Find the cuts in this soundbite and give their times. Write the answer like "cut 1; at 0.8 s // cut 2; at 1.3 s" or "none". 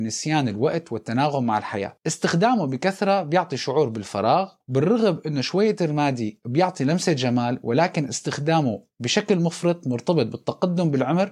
cut 1; at 4.6 s